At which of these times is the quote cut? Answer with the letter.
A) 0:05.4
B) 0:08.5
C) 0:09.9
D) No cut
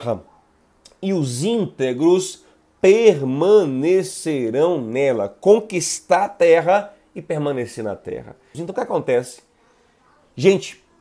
B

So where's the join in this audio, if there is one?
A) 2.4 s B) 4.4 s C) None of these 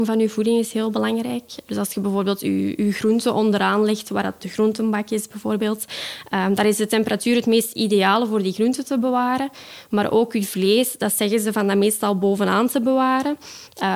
B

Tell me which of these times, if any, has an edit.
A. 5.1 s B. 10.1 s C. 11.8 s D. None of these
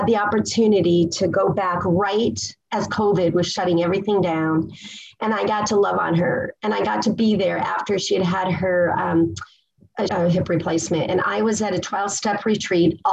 B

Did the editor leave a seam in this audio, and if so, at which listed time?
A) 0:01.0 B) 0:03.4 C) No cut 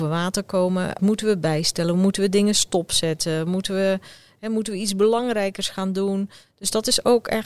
A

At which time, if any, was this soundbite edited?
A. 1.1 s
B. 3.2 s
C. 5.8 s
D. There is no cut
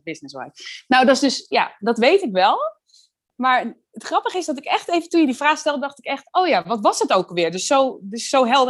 D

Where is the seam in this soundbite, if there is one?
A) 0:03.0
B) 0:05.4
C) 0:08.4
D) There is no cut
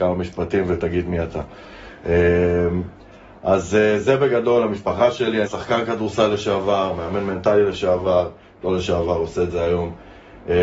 B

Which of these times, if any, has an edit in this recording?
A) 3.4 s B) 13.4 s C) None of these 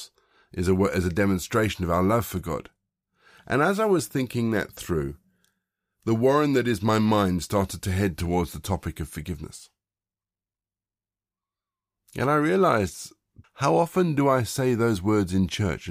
B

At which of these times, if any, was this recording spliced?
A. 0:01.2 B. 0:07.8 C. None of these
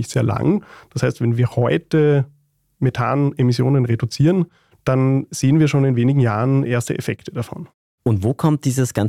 C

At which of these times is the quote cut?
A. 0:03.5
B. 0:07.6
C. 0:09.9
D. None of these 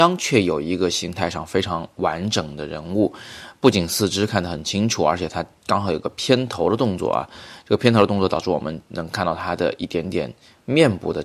D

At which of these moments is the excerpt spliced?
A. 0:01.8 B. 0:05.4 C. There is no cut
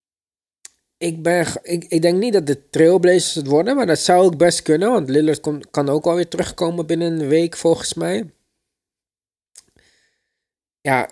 C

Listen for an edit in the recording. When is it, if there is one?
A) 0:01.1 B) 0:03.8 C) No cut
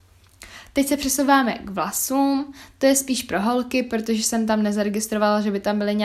C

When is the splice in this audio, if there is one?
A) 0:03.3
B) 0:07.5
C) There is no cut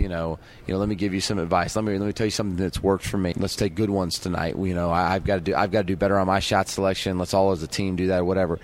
A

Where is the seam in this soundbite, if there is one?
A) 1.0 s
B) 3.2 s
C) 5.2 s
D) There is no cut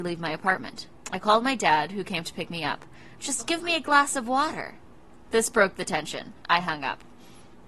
B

